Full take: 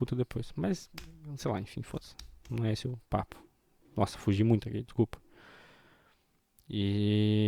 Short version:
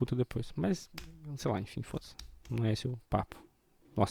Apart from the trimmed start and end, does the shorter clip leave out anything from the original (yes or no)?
no